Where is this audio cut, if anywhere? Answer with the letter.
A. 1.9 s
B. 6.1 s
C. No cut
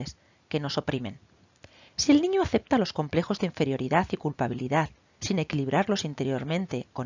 A